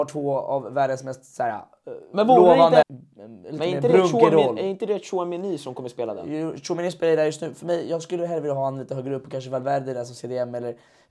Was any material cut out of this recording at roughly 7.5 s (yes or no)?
no